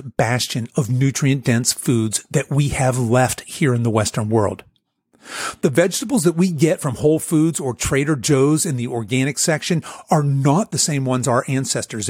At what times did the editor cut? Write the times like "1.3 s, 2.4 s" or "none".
none